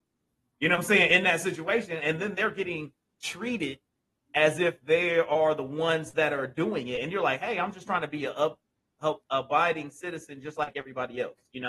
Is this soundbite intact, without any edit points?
yes; 0 cuts

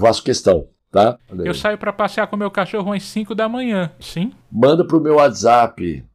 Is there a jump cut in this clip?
yes; 2 cuts; at 1.2 s, 4.0 s

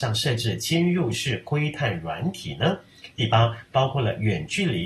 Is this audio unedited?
no; 1 cut; at 3.6 s

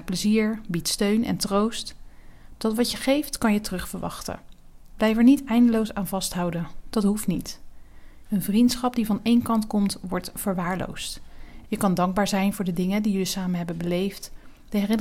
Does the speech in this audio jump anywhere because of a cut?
yes; 3 cuts; at 4.9 s, 8.2 s, 11.6 s

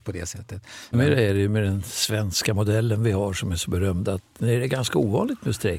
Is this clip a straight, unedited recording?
no; 1 cut; at 0.9 s

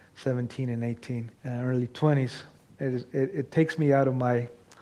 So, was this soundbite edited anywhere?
yes; 2 cuts; at 1.4 s, 2.7 s

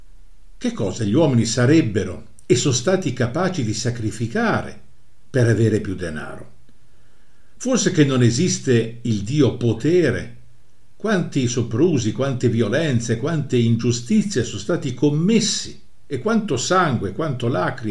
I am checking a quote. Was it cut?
no; 0 cuts

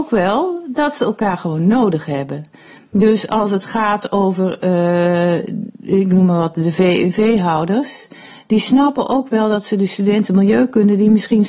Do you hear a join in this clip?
no; 0 cuts

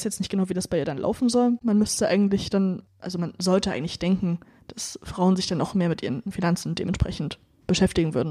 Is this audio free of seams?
no; 1 cut; at 1.6 s

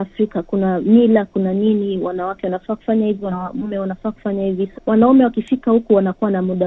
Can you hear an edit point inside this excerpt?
yes; 1 cut; at 4.7 s

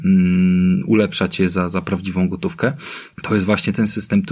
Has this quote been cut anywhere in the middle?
yes; 1 cut; at 3.1 s

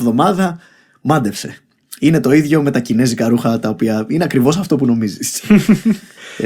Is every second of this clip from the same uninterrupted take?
yes; 0 cuts

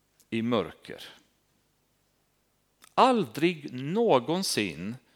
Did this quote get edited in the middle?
no; 0 cuts

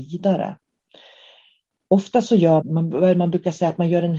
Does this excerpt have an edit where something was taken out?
yes; 1 cut; at 2.6 s

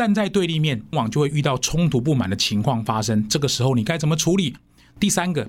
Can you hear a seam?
yes; 1 cut; at 0.9 s

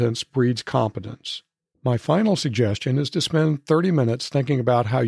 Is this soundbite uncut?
no; 1 cut; at 1.7 s

